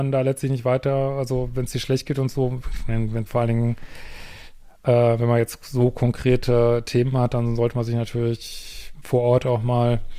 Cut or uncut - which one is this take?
uncut